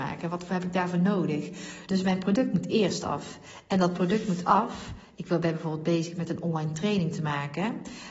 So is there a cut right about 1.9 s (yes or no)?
yes